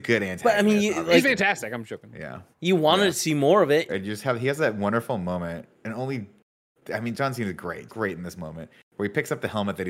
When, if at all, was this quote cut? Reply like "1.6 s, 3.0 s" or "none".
2.5 s, 3.9 s, 7.9 s